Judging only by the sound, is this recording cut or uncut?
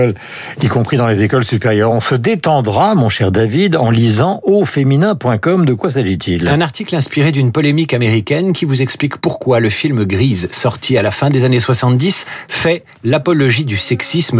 uncut